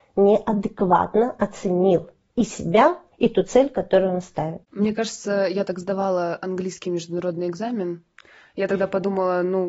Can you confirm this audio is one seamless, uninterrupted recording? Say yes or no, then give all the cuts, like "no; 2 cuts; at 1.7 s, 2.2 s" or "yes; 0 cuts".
yes; 0 cuts